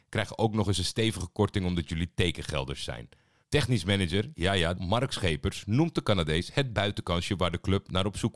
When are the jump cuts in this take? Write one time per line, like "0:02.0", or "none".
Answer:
0:03.4
0:04.7